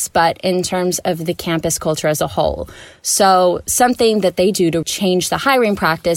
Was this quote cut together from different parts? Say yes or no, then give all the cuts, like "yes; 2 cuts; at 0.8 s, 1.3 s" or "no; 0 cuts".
yes; 1 cut; at 4.8 s